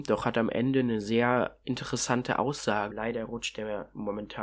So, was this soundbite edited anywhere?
yes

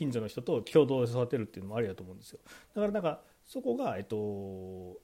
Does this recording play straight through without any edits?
yes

